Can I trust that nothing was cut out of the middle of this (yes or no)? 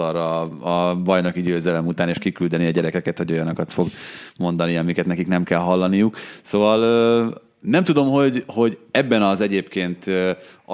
yes